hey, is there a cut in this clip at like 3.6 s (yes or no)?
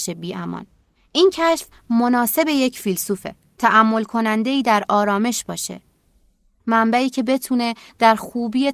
yes